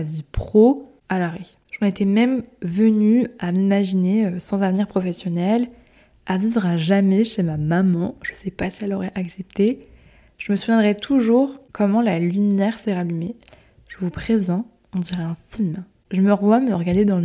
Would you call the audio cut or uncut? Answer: uncut